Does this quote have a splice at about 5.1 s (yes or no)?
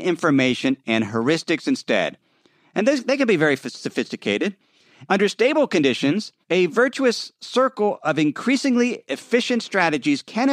yes